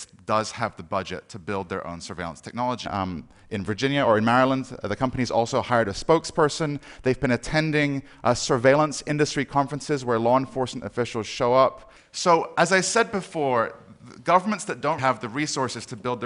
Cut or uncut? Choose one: cut